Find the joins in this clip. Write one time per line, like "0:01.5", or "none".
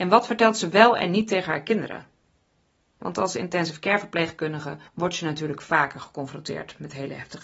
0:02.9
0:04.9